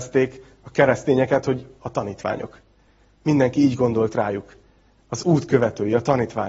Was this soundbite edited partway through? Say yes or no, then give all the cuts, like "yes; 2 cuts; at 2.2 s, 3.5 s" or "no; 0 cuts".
no; 0 cuts